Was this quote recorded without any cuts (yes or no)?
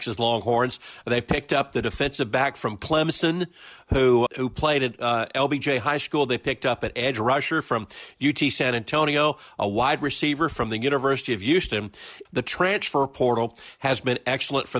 no